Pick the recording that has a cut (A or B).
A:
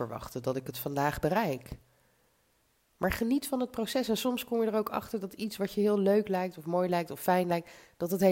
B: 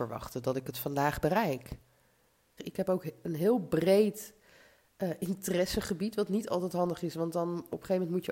B